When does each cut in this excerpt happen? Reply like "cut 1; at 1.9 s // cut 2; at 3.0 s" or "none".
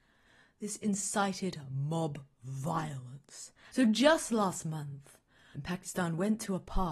cut 1; at 3.7 s // cut 2; at 5.5 s